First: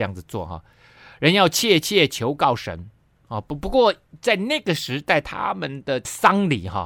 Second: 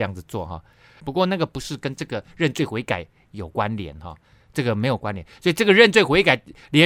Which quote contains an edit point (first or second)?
second